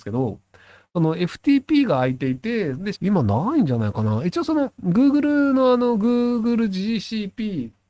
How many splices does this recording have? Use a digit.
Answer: 1